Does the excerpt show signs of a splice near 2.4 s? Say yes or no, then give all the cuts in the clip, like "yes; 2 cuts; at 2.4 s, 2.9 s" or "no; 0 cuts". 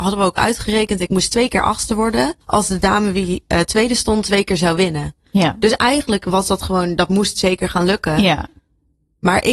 yes; 1 cut; at 2.4 s